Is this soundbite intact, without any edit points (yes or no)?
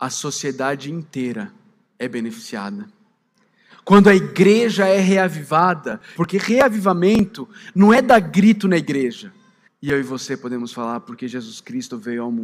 no